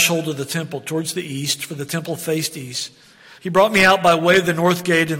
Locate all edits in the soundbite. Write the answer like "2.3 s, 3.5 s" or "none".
3.4 s

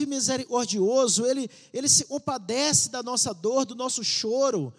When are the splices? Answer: none

